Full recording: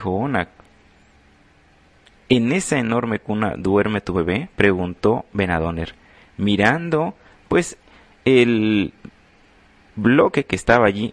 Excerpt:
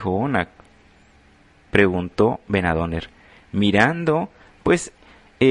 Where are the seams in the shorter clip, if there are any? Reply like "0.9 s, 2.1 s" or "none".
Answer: 1.7 s